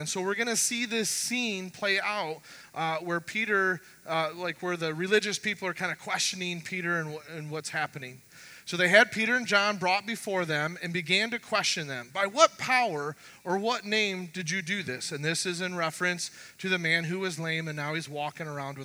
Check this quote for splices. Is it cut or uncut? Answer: uncut